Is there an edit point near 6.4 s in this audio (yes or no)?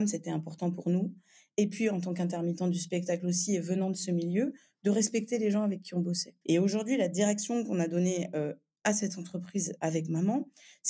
yes